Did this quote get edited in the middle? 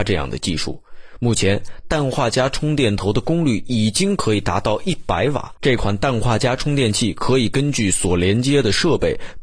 yes; 1 cut; at 5.6 s

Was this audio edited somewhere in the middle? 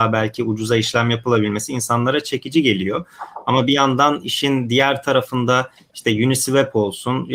no; 0 cuts

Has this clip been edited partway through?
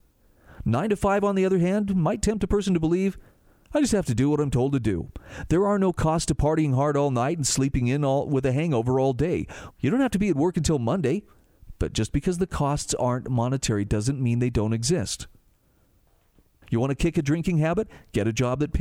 yes; 2 cuts; at 9.7 s, 16.6 s

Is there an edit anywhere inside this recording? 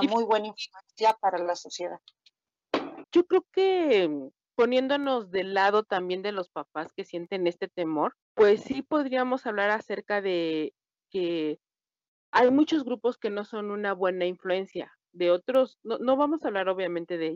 yes; 2 cuts; at 3.0 s, 8.2 s

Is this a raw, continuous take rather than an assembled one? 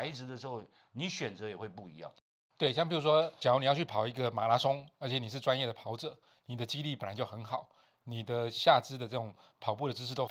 yes; 0 cuts

